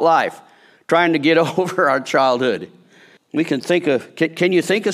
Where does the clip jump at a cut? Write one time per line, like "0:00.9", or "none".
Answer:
0:03.2